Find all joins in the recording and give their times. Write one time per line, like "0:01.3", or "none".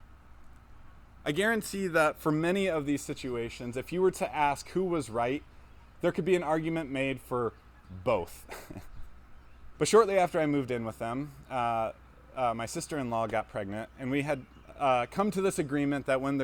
0:09.7